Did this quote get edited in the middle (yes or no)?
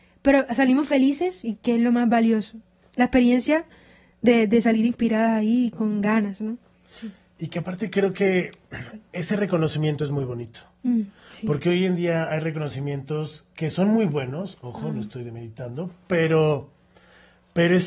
no